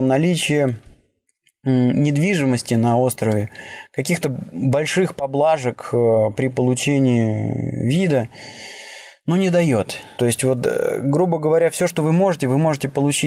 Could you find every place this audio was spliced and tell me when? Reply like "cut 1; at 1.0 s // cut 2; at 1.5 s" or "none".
cut 1; at 10.2 s